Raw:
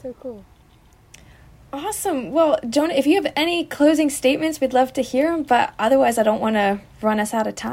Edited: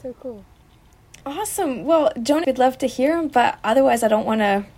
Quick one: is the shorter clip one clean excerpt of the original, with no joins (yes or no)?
no